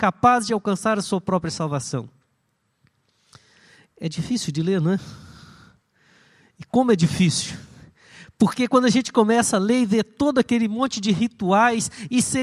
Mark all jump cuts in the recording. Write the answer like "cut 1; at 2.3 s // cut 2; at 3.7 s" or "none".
none